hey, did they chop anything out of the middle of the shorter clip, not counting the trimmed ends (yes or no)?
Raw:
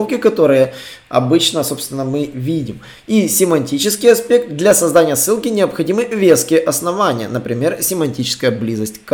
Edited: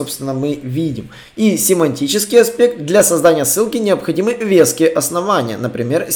no